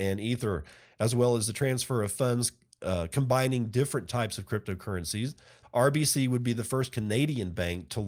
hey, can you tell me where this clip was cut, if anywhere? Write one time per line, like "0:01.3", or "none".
0:05.6